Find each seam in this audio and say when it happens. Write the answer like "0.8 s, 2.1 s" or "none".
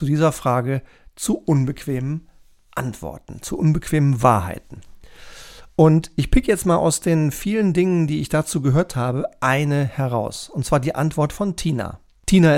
none

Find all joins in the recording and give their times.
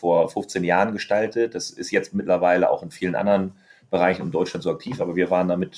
none

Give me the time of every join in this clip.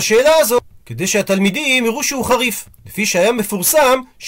none

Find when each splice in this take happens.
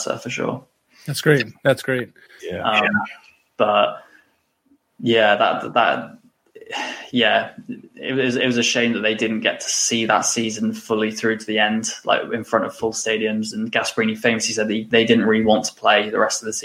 2.4 s, 14.9 s

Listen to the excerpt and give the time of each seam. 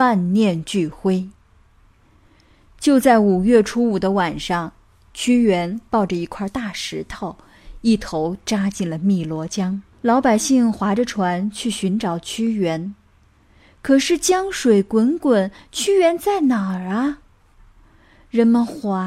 9.9 s

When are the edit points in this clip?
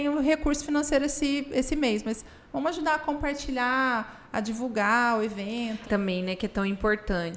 5.9 s

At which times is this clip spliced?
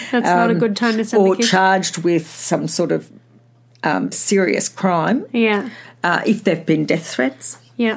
4.1 s

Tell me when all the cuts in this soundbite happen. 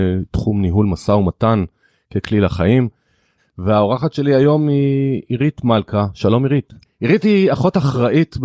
3.4 s, 6.8 s

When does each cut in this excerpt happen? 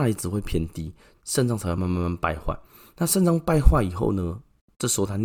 1.8 s

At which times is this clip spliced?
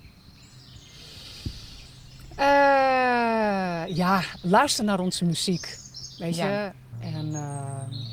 6.9 s

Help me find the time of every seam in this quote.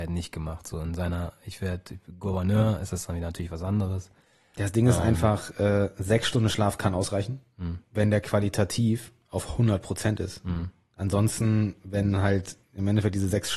none

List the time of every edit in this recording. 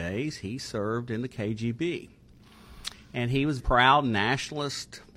3.6 s

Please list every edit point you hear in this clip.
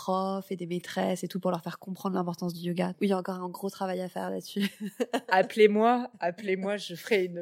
2.9 s

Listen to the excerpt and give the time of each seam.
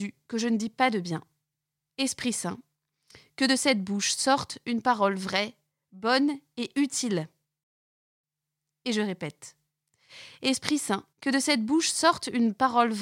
1.9 s, 11.1 s

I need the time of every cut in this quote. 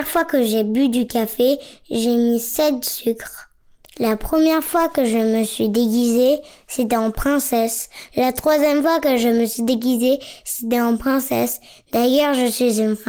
8.1 s

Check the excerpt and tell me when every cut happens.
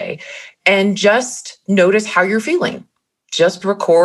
none

